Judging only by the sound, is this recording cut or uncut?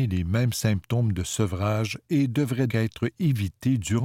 cut